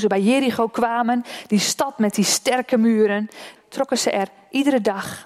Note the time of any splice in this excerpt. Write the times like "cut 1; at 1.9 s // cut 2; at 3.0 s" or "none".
cut 1; at 3.6 s